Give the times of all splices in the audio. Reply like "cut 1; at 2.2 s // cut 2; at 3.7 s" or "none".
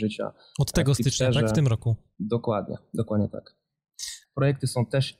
cut 1; at 4.2 s